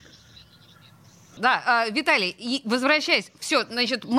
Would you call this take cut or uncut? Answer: cut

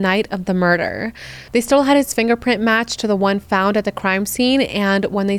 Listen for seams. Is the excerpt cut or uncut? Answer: cut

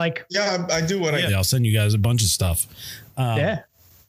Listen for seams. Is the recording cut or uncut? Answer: cut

